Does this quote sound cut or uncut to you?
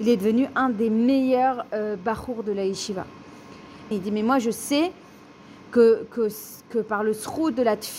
cut